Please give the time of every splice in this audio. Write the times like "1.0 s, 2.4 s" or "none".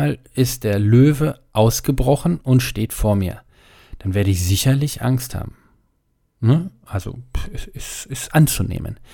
none